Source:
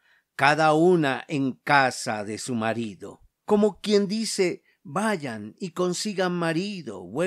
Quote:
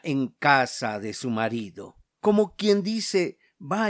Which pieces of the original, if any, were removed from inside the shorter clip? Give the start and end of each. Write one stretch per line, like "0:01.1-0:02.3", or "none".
none